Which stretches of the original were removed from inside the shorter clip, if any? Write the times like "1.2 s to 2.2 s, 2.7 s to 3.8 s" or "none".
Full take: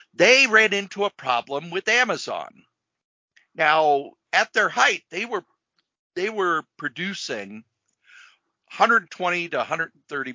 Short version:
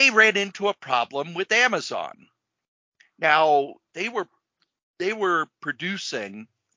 4.3 s to 5.1 s